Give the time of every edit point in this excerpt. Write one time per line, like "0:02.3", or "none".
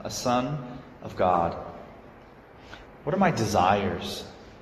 0:02.8